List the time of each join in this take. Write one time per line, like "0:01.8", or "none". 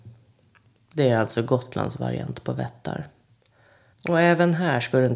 0:03.9

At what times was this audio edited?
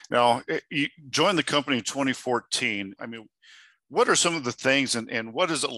0:03.0

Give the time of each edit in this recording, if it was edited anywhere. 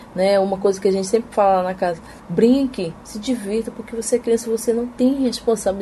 0:02.2

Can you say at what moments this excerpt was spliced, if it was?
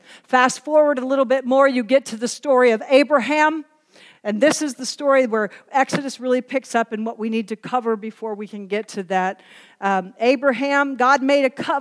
none

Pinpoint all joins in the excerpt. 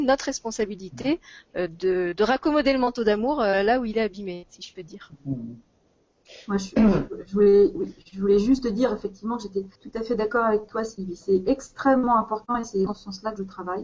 0:09.8
0:12.9

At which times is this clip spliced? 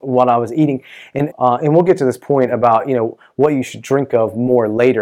0:01.3

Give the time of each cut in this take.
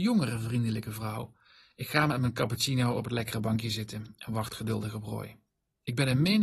none

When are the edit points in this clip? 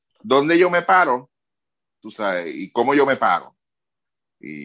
none

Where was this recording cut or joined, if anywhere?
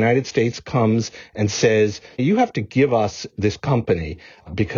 0:02.2

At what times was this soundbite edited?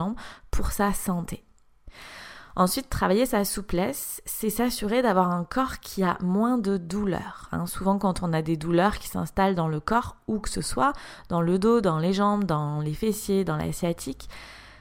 none

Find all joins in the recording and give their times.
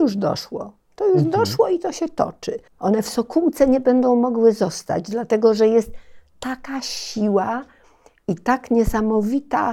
0:02.7

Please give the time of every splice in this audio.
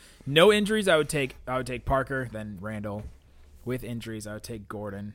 0:02.3

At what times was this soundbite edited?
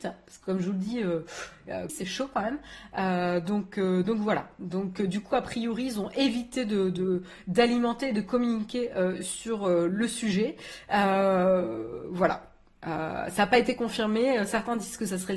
0:01.9

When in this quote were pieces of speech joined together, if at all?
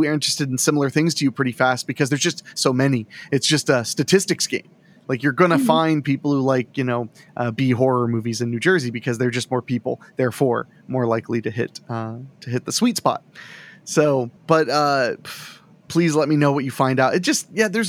0:14.4
0:15.9

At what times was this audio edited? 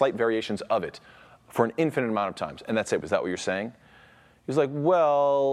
0:03.0

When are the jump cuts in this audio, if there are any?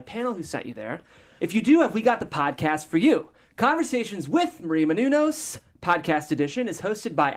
0:01.4

